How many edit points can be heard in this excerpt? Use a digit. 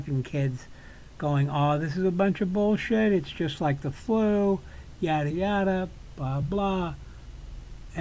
2